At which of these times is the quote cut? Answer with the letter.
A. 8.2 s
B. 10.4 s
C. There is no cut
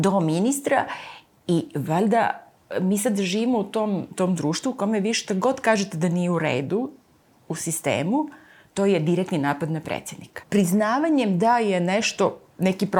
B